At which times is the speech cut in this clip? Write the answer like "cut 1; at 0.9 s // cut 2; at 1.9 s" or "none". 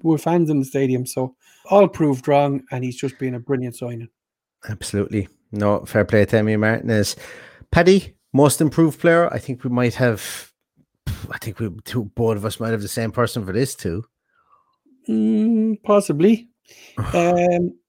cut 1; at 1.6 s